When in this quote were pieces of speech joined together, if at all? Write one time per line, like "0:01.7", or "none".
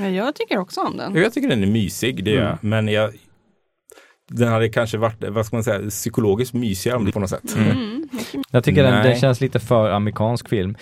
0:07.1
0:08.4

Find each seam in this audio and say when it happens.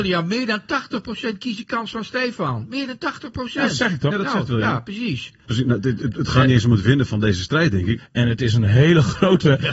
0:05.4
0:08.0

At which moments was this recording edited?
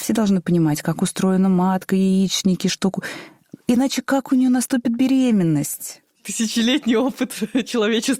0:06.1

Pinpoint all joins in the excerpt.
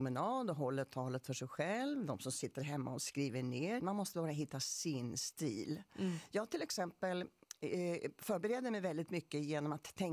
0:03.8

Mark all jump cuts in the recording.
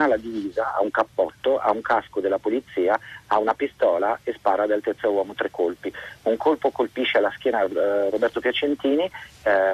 none

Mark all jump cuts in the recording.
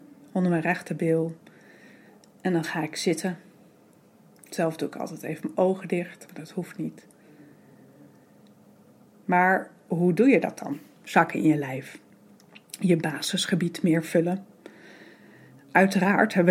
0:09.1

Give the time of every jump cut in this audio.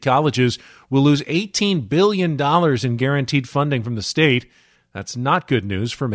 0:04.8

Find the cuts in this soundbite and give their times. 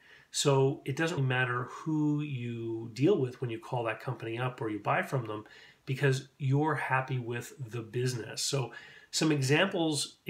0:01.2

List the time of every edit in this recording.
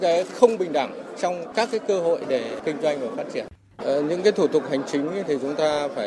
0:03.8

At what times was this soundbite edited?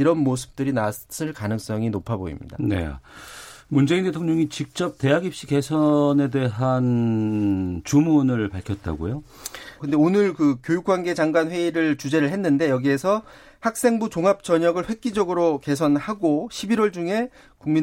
0:09.8

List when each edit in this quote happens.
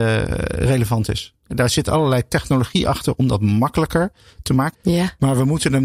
0:01.5
0:04.7

